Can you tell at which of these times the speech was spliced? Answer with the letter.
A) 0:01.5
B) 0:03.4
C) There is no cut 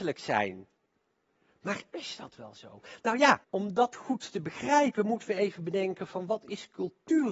B